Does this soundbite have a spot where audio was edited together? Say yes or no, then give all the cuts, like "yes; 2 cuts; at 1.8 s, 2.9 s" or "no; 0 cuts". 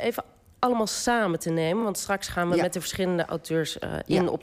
no; 0 cuts